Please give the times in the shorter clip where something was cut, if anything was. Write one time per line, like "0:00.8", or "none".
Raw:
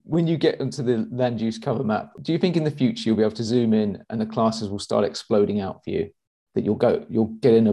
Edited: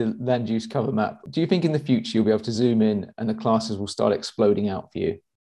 none